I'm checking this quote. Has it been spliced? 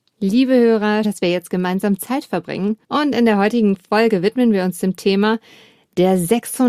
yes; 2 cuts; at 1.0 s, 2.8 s

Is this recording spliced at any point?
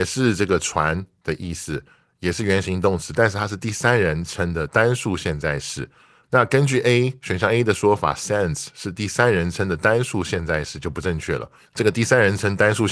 no; 0 cuts

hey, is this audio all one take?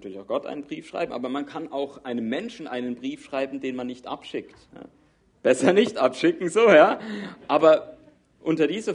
no; 1 cut; at 4.7 s

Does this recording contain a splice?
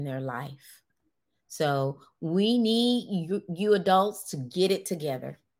no; 0 cuts

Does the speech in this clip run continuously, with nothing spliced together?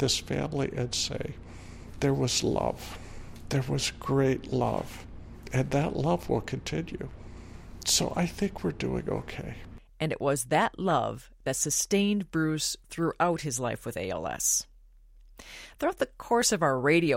yes; 0 cuts

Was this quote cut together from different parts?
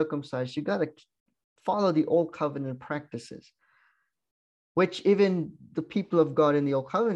no; 0 cuts

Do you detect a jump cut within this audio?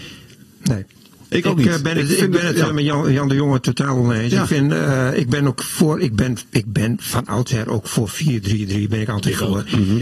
no; 0 cuts

